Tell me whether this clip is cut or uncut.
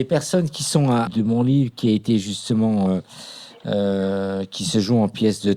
cut